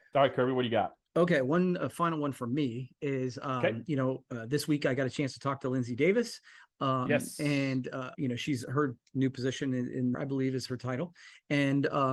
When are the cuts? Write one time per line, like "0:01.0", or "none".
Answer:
0:08.1
0:10.1